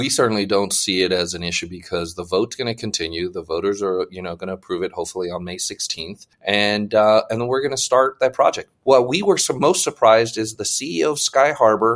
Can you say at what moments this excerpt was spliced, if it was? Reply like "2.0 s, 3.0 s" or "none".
6.3 s